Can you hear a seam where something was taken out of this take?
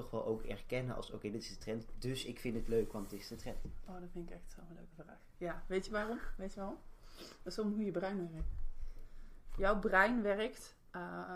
no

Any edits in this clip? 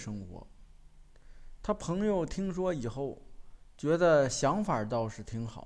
no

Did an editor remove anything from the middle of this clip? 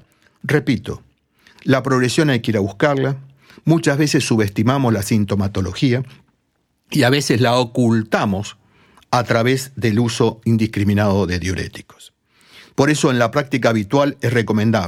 no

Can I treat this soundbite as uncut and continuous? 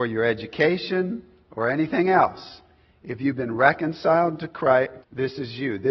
no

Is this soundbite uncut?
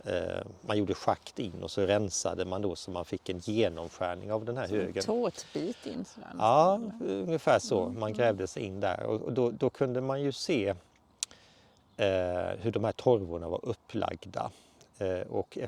yes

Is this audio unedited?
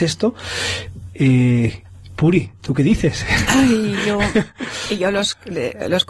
yes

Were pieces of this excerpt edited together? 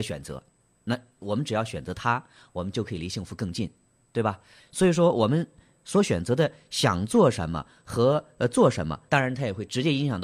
yes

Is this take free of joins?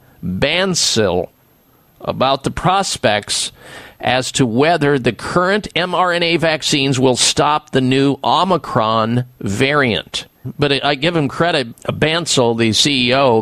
no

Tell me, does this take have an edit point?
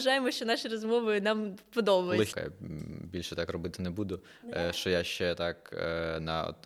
yes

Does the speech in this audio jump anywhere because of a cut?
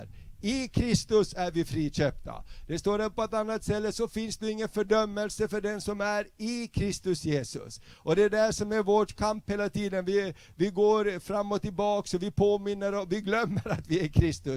no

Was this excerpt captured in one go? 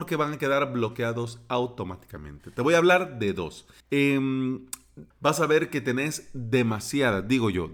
no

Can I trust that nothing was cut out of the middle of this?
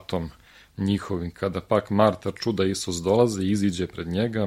yes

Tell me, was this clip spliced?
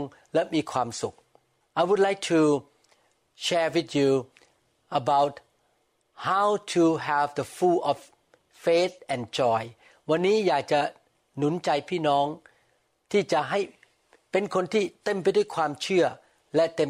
no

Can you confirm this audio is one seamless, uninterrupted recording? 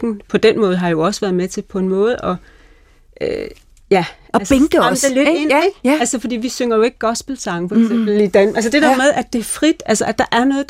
yes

